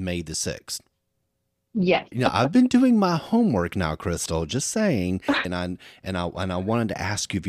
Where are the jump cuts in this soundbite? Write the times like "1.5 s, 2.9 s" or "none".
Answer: 2.1 s, 5.4 s